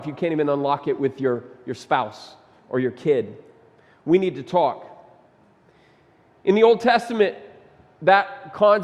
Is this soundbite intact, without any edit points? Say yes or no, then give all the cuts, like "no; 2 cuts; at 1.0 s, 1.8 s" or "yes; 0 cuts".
yes; 0 cuts